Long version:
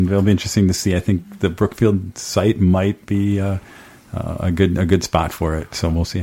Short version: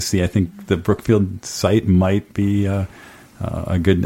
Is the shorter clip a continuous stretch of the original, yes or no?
yes